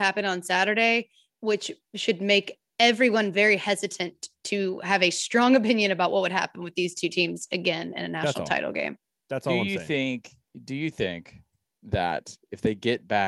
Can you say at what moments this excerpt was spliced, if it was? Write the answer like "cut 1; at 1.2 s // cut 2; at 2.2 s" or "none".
none